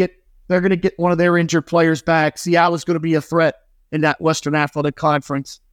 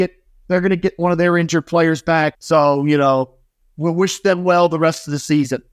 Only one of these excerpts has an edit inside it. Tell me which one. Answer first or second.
second